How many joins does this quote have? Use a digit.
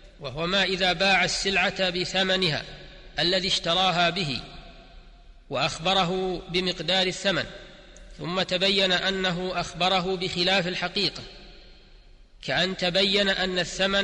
0